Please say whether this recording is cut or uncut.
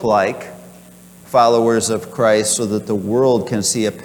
cut